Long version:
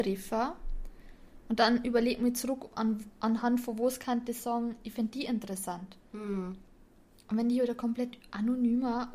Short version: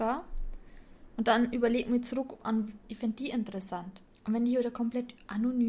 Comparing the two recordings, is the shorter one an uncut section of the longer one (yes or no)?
no